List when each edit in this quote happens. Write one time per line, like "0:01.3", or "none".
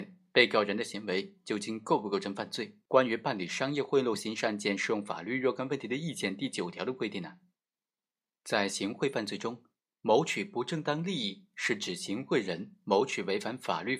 0:02.9